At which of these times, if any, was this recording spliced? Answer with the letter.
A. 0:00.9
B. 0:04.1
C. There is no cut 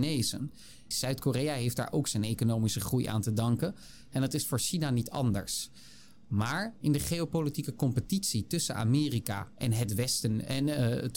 A